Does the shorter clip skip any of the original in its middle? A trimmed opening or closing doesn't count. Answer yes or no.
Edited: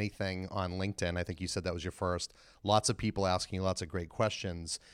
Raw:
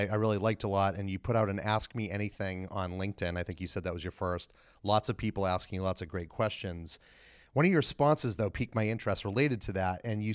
no